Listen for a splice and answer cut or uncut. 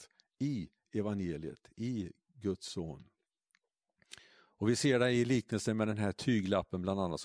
uncut